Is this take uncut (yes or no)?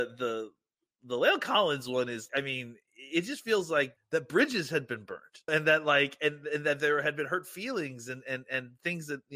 no